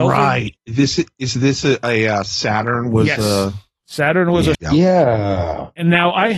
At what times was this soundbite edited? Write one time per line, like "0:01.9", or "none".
0:04.5

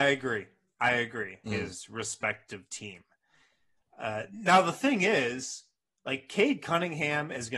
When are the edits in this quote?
0:01.5

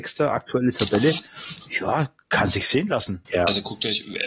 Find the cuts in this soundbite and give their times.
0:03.2

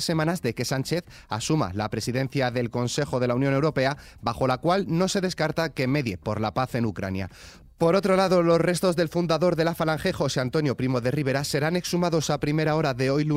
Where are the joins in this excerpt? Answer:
none

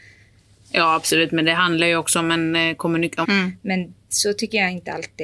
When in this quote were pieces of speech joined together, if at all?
0:03.2

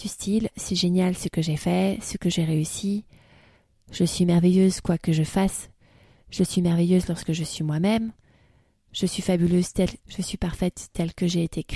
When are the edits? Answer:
0:10.0

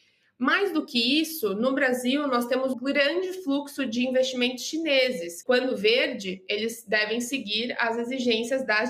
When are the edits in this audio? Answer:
0:02.7
0:05.4

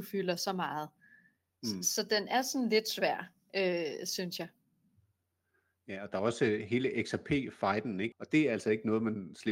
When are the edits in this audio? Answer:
0:08.1

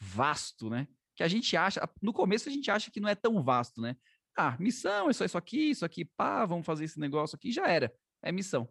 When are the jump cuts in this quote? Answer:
none

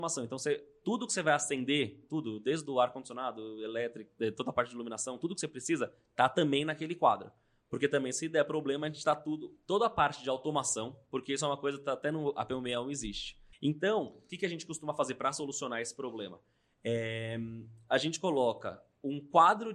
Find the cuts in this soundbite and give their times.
0:09.6
0:13.5

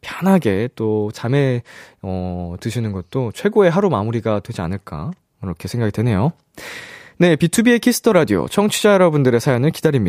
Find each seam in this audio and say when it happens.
none

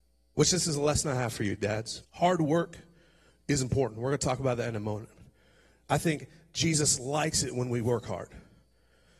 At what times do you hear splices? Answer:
0:02.0

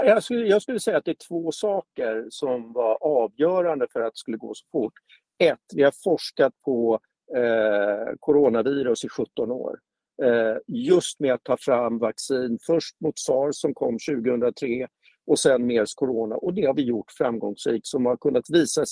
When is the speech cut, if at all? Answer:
none

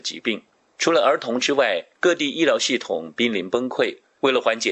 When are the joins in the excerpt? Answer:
0:01.9

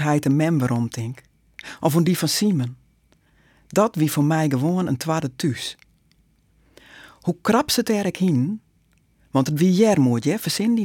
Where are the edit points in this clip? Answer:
none

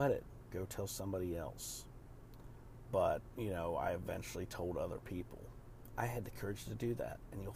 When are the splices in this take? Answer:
0:02.9
0:05.9

